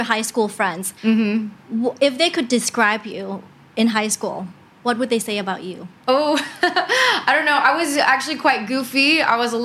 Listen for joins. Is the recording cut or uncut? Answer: cut